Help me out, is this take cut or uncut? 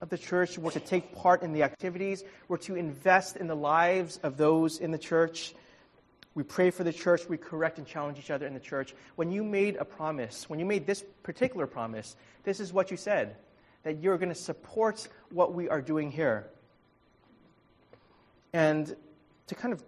uncut